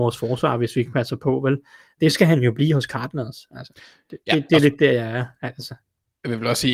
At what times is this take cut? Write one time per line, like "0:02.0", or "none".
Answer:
none